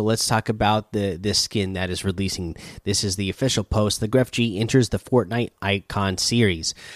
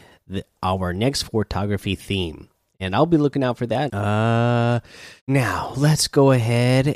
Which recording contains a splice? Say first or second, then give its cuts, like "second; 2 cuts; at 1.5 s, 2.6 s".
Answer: second; 2 cuts; at 3.9 s, 5.2 s